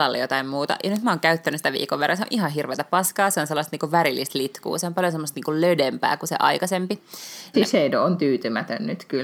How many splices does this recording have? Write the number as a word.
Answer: one